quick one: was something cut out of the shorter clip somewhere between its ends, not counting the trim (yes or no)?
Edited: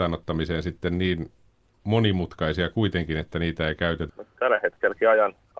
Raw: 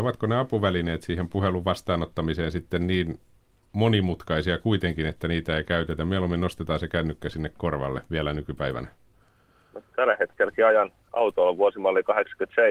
yes